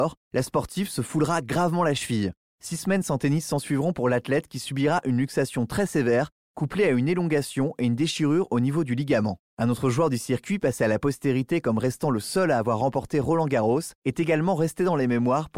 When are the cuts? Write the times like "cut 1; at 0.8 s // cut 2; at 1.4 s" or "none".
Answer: cut 1; at 9.5 s